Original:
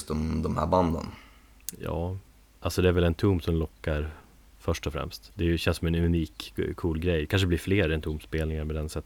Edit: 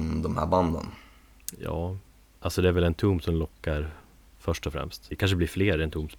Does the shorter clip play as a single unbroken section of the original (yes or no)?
no